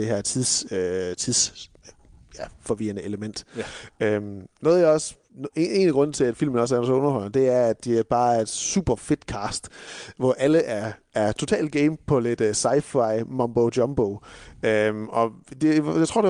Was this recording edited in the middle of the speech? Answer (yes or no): no